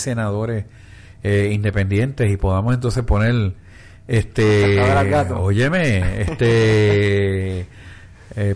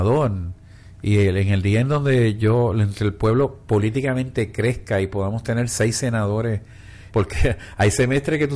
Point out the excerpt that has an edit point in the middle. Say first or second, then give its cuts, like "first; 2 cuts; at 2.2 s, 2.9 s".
second; 1 cut; at 7.1 s